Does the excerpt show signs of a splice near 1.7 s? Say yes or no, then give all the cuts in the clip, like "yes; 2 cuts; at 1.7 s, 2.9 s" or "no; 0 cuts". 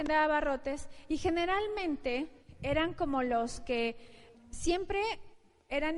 no; 1 cut; at 4.3 s